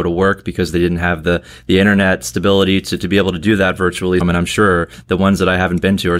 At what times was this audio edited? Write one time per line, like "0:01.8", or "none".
0:04.2